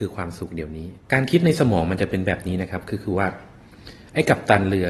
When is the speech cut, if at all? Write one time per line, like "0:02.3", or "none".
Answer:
0:01.0